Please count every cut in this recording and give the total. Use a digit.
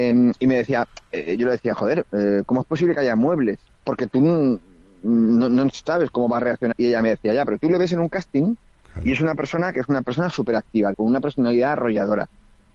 3